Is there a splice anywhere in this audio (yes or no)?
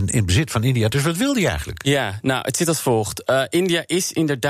no